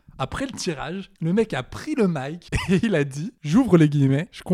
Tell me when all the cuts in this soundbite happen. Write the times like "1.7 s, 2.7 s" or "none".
none